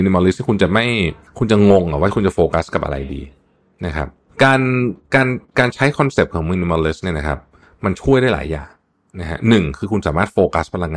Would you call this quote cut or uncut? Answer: uncut